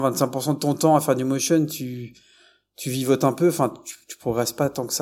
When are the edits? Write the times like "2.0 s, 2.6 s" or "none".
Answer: none